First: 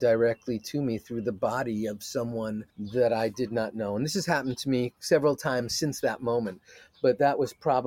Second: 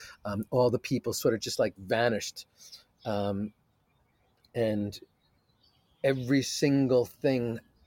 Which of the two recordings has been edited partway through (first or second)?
first